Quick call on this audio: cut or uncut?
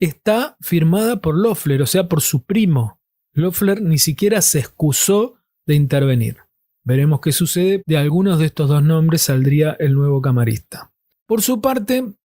cut